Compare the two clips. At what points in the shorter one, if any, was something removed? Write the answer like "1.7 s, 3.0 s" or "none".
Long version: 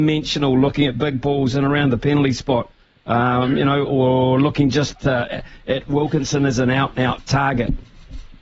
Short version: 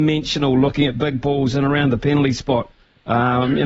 none